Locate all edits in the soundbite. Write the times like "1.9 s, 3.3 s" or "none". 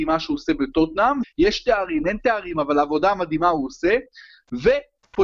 1.2 s